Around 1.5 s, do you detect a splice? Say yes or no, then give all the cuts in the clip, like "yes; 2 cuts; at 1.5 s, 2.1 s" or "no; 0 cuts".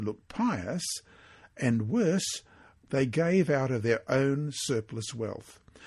no; 1 cut; at 2.9 s